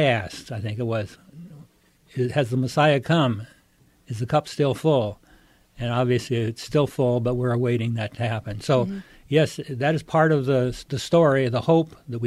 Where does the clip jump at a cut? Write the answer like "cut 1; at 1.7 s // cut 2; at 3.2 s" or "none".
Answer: none